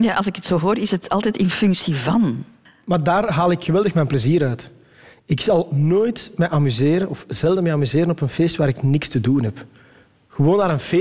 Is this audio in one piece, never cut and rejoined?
yes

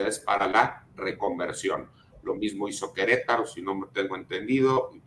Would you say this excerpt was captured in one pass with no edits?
yes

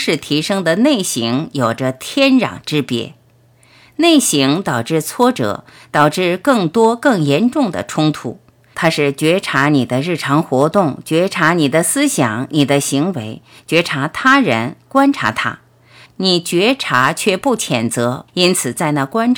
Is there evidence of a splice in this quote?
yes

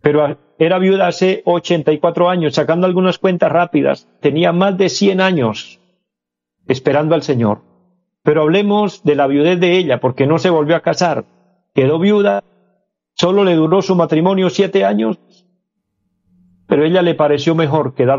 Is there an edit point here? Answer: yes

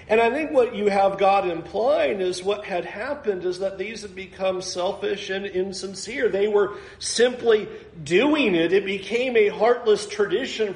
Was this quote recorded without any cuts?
yes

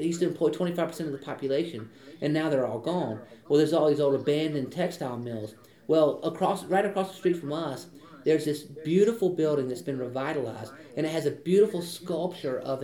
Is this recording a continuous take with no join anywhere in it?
yes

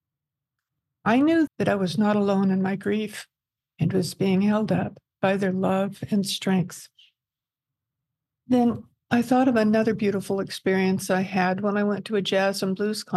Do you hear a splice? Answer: yes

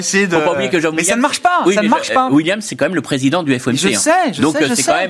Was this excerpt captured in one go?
yes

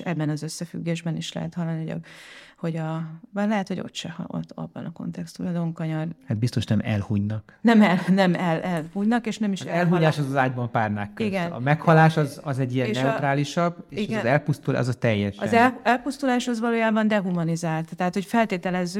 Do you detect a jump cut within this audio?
no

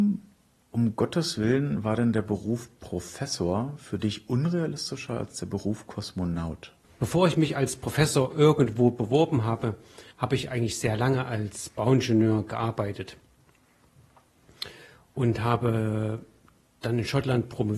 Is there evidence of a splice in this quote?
yes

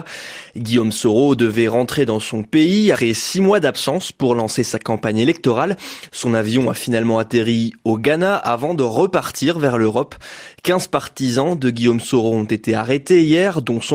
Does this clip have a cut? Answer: yes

